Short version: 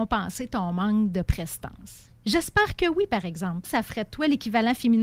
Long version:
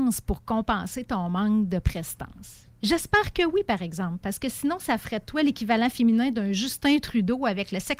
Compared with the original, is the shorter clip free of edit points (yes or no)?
no